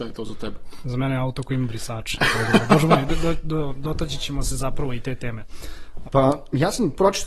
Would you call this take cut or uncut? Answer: cut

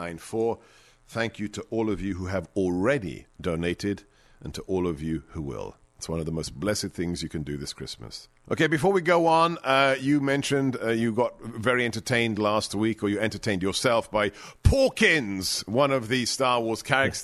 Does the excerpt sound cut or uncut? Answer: uncut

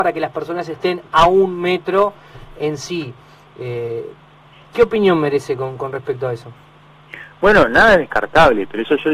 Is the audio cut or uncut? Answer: uncut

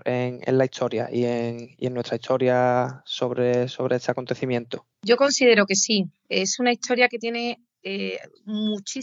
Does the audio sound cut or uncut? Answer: uncut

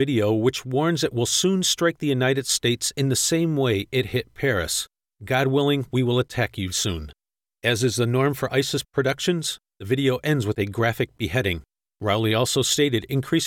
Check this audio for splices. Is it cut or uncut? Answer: cut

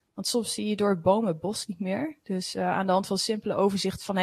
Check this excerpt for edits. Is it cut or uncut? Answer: uncut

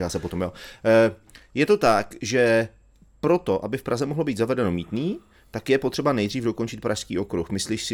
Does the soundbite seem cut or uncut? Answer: uncut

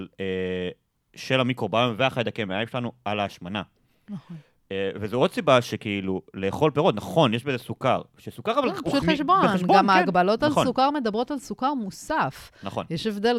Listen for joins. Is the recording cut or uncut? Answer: cut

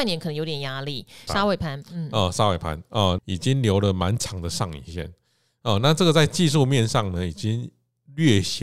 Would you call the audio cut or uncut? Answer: cut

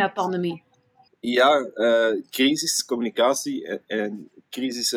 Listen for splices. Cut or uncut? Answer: cut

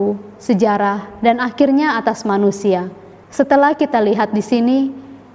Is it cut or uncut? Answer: cut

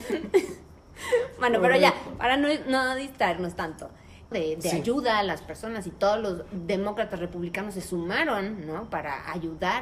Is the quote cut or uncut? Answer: cut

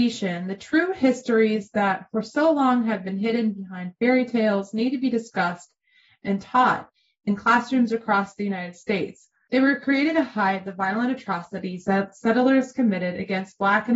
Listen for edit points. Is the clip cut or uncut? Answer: cut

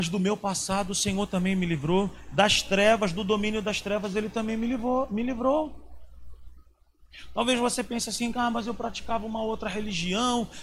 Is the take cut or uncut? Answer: uncut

